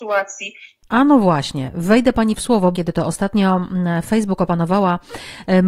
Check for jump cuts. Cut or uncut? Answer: cut